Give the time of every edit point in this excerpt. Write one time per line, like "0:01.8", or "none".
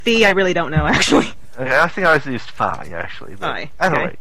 none

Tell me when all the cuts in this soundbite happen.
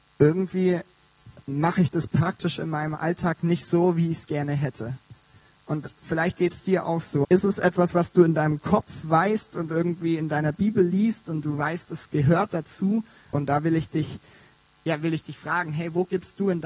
0:07.2
0:13.3

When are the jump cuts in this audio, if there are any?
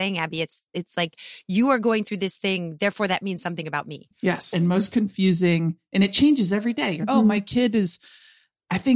0:04.5
0:07.0

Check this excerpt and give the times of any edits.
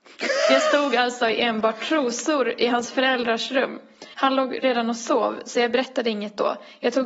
0:04.1

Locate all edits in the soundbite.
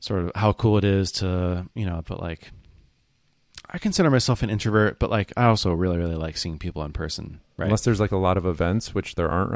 0:02.0
0:07.6

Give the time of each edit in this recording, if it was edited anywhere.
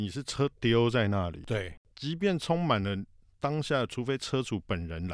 none

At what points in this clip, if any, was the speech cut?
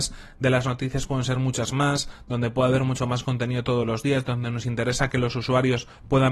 none

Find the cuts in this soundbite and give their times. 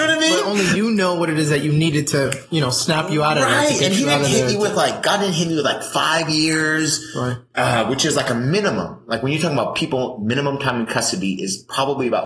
none

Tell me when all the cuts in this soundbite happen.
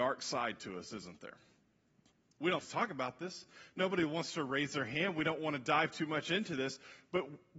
0:02.6

